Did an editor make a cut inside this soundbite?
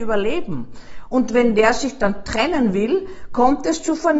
no; 0 cuts

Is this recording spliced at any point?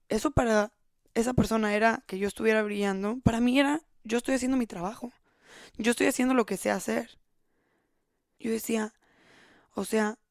yes; 1 cut; at 8.4 s

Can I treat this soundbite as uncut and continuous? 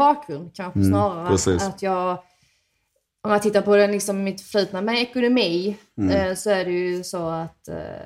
yes; 0 cuts

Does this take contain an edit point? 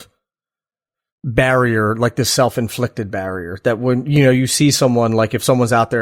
no; 0 cuts

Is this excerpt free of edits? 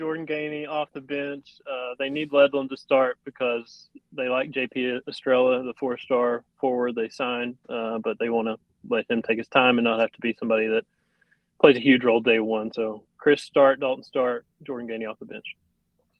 yes; 0 cuts

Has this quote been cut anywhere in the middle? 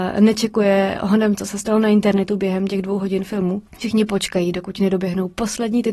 yes; 1 cut; at 3.7 s

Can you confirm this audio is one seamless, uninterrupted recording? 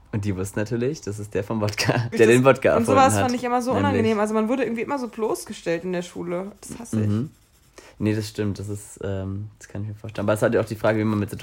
no; 1 cut; at 2.1 s

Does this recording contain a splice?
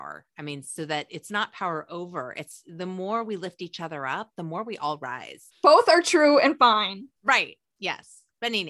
yes; 1 cut; at 5.5 s

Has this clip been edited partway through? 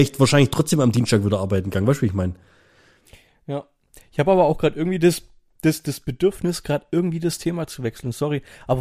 no; 0 cuts

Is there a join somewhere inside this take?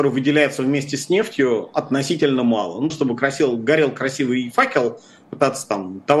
yes; 2 cuts; at 2.9 s, 5.3 s

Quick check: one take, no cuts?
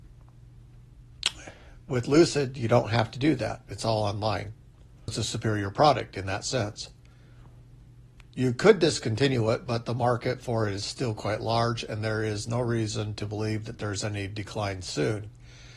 no; 1 cut; at 5.1 s

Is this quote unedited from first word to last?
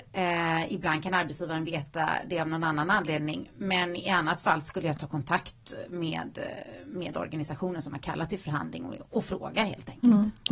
yes; 0 cuts

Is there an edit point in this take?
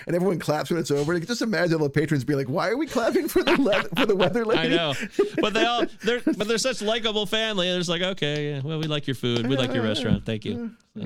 no; 0 cuts

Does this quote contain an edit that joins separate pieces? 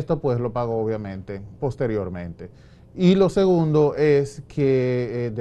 yes; 1 cut; at 1.6 s

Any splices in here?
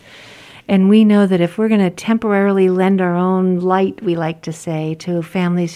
no; 0 cuts

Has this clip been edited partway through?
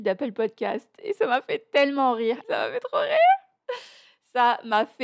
yes; 1 cut; at 2.4 s

